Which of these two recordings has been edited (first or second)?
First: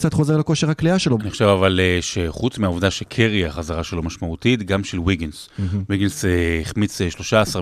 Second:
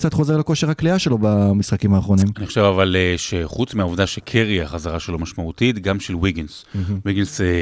first